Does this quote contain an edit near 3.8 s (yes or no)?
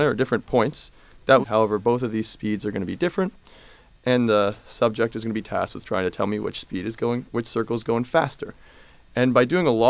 no